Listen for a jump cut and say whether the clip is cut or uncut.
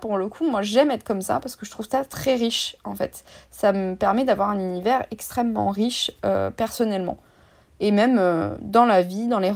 uncut